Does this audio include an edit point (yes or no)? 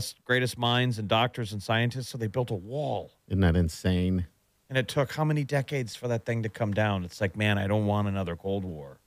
no